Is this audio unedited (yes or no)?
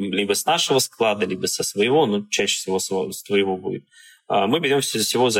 yes